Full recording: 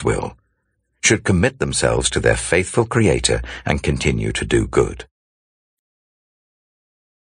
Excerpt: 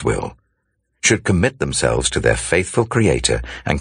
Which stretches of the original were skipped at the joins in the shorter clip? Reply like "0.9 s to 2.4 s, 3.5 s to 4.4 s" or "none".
none